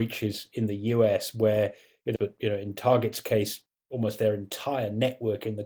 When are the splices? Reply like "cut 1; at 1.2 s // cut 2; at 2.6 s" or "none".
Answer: cut 1; at 2.2 s